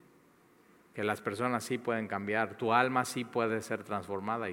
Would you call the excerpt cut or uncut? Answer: uncut